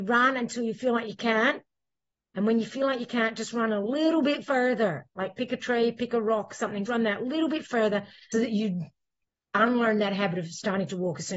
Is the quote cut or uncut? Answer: cut